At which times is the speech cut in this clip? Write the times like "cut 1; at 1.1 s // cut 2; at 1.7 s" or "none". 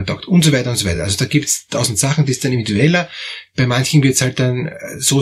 none